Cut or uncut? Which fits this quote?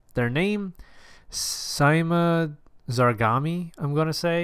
uncut